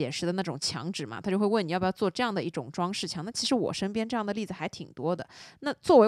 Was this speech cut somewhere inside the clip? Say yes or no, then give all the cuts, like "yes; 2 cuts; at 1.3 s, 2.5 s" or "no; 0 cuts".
no; 0 cuts